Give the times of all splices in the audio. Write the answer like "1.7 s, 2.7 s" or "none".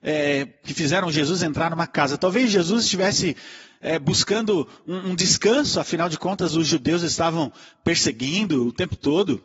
none